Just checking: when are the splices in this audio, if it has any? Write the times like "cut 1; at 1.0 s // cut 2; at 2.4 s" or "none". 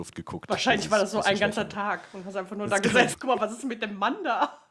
cut 1; at 3.1 s